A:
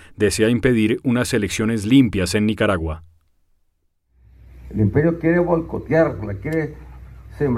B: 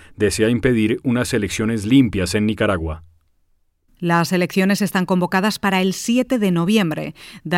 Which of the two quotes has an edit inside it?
B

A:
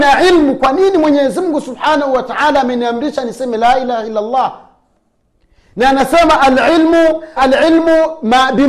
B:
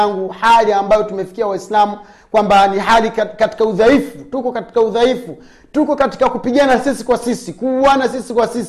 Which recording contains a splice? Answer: A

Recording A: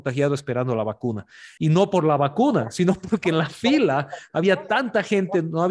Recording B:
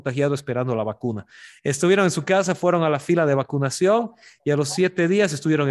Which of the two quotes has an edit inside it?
A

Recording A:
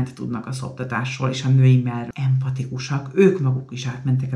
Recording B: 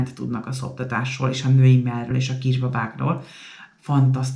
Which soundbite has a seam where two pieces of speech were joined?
A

